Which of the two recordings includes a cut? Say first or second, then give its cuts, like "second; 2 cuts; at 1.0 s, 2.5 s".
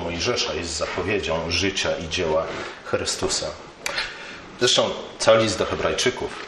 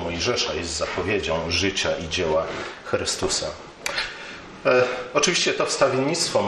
first; 1 cut; at 4.6 s